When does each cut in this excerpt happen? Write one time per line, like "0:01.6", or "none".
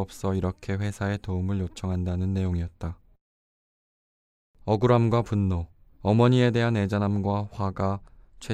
0:05.9